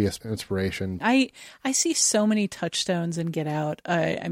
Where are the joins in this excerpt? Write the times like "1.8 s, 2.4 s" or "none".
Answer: 1.0 s